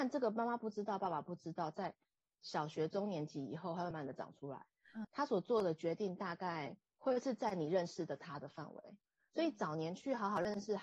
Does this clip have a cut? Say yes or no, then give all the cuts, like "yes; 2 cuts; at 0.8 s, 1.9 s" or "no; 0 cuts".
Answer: yes; 2 cuts; at 3.9 s, 5.0 s